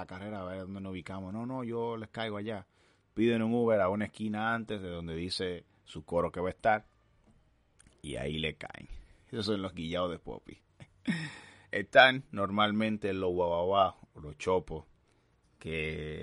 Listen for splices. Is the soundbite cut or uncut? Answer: uncut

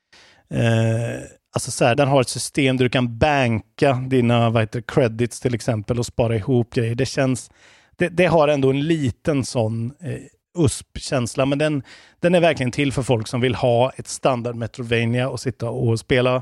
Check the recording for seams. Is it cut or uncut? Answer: cut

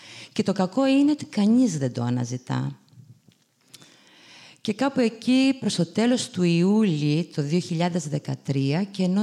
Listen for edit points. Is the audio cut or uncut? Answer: uncut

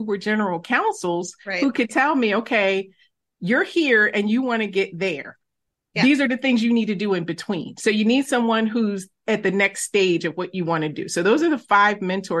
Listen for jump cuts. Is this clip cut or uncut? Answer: uncut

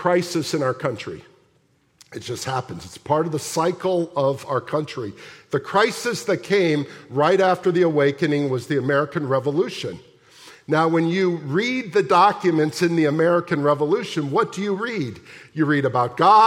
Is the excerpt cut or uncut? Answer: uncut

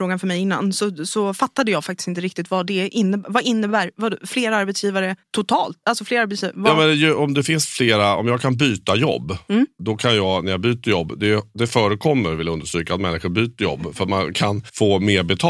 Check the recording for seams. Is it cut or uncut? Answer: uncut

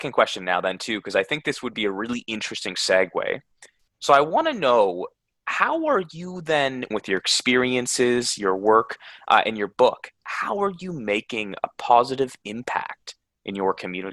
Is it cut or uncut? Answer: cut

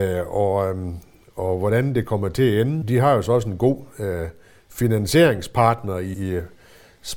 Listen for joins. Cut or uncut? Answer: cut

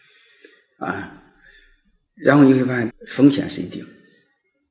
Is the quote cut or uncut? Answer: cut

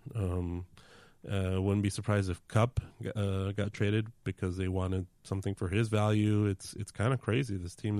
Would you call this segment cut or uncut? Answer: uncut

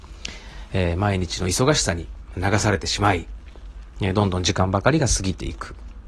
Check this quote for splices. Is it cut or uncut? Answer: uncut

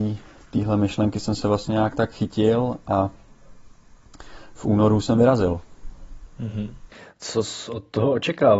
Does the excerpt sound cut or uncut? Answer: uncut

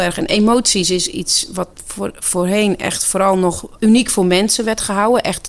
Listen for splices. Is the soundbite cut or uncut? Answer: cut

